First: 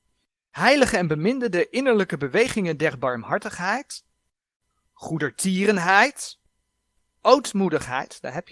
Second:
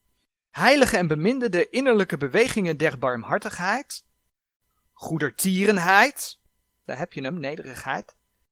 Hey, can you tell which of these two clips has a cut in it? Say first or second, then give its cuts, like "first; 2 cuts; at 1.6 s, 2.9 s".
second; 1 cut; at 6.9 s